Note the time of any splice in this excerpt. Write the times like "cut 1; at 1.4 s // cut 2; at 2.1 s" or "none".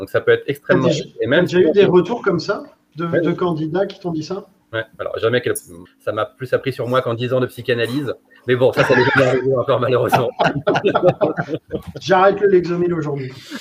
cut 1; at 5.9 s

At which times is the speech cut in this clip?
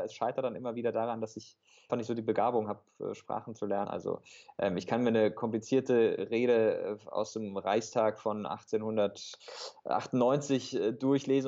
cut 1; at 1.9 s // cut 2; at 3.8 s

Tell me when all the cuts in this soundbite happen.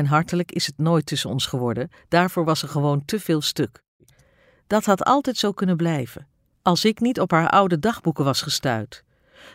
cut 1; at 6.5 s

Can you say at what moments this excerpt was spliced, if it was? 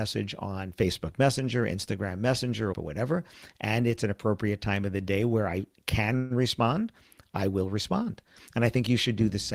cut 1; at 2.7 s

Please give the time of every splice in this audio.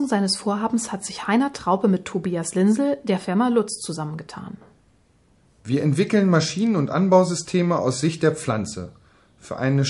none

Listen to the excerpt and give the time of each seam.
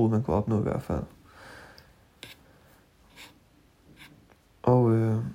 none

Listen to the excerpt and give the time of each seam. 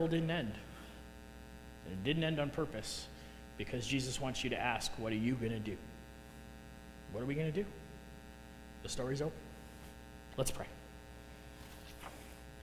none

